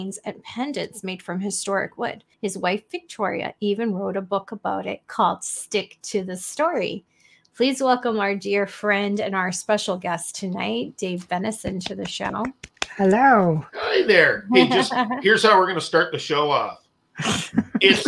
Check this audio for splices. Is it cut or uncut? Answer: cut